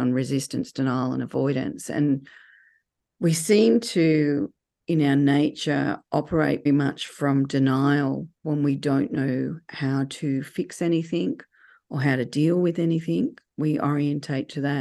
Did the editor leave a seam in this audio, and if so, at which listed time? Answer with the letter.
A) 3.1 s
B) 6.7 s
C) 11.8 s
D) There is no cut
B